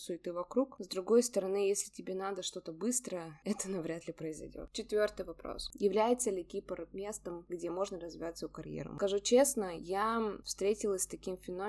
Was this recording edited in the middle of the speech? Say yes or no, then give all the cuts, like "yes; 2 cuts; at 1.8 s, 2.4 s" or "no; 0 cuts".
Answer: no; 0 cuts